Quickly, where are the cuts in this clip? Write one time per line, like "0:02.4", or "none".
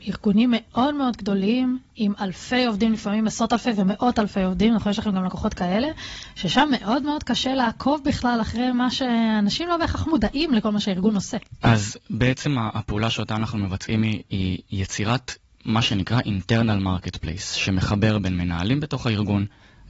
0:11.6